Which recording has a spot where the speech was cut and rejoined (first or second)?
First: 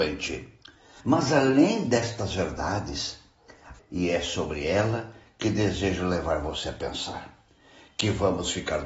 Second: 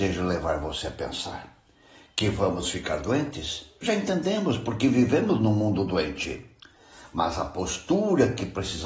first